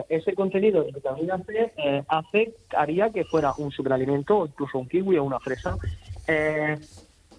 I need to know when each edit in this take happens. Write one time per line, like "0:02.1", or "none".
none